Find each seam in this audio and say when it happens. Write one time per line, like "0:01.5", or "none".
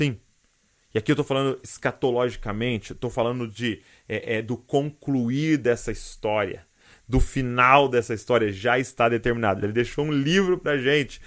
0:09.6

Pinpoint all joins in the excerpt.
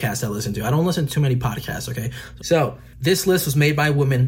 0:02.4

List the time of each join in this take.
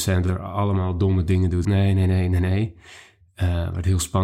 0:01.6

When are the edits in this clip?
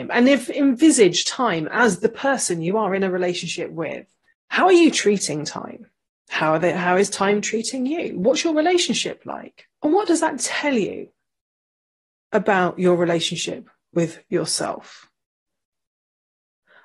0:09.7

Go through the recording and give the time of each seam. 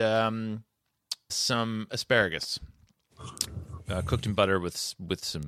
0:01.3

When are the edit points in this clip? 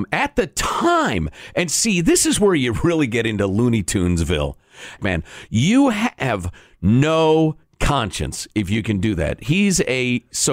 0:05.0

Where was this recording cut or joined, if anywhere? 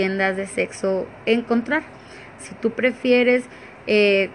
0:02.4

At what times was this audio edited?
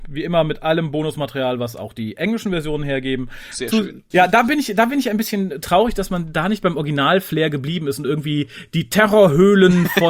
0:04.1

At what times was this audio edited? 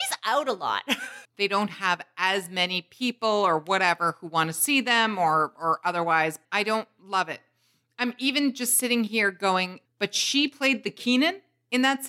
0:01.2
0:06.4
0:09.8

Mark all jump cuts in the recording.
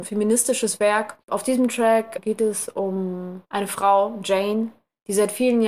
0:01.2

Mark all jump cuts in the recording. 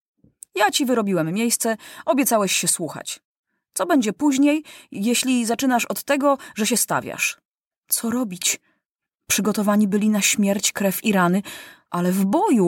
0:07.7

